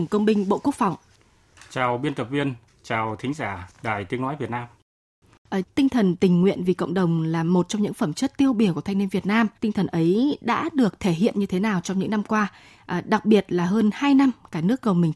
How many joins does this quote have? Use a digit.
2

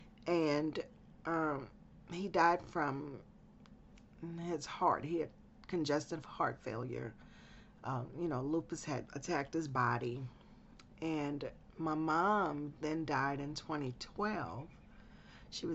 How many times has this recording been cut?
1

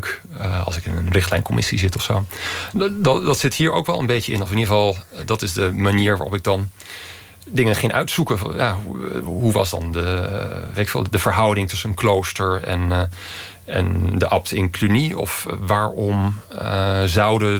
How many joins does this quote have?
0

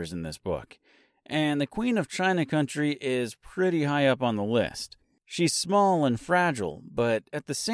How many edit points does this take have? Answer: 0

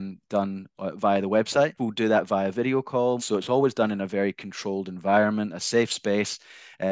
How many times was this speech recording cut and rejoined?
2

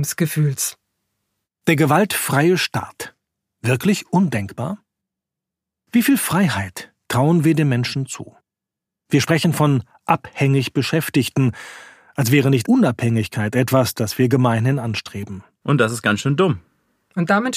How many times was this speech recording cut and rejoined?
2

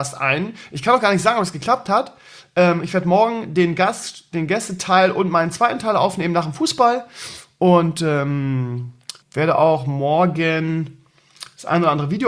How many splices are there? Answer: 1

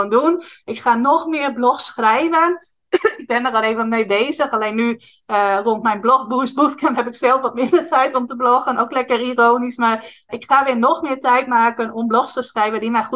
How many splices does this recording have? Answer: 1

